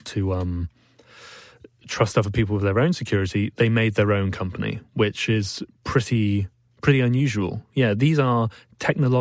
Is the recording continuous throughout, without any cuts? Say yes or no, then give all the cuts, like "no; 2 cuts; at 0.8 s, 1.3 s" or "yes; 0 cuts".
yes; 0 cuts